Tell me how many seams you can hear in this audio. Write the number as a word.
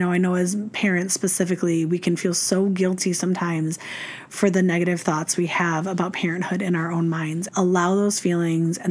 one